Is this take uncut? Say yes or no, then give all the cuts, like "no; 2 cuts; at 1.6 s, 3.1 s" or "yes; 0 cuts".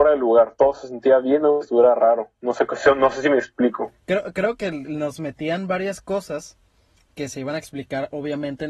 yes; 0 cuts